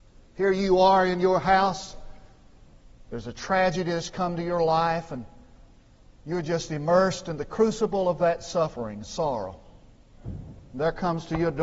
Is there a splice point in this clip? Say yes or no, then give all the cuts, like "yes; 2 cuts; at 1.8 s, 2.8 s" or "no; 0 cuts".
no; 0 cuts